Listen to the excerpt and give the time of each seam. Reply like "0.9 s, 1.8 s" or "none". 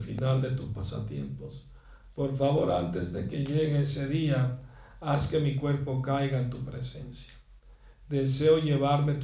none